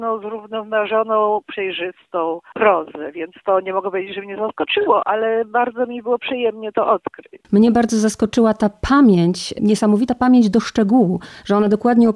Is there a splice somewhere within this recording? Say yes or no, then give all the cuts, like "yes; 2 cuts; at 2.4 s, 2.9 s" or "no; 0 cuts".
yes; 1 cut; at 1.5 s